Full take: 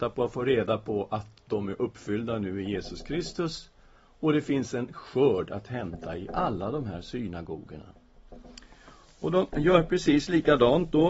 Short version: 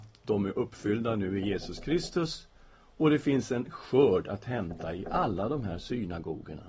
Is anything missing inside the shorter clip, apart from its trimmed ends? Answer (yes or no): no